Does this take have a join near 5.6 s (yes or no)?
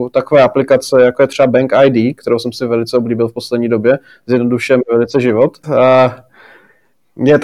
yes